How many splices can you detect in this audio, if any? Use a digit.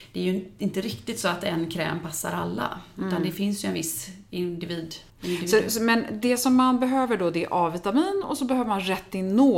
1